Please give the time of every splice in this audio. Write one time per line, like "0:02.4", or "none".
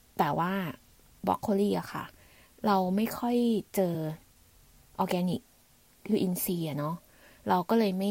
none